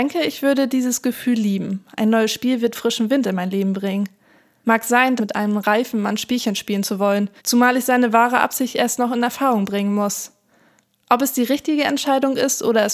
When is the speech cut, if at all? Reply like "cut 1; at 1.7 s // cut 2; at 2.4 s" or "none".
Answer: cut 1; at 5.2 s // cut 2; at 7.4 s